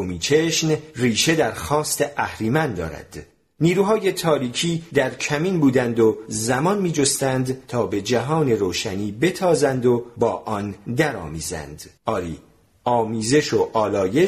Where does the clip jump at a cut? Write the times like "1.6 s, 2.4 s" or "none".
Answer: 12.0 s